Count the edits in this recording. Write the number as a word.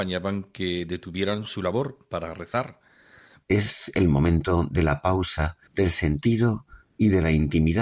two